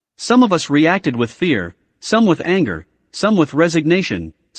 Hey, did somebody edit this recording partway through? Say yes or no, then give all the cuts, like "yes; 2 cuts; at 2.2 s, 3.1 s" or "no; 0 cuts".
no; 0 cuts